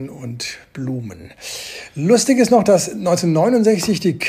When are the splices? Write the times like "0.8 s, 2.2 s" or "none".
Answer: none